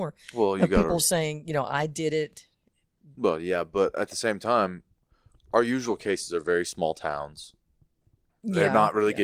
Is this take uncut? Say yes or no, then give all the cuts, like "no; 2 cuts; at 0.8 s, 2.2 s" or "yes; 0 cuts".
yes; 0 cuts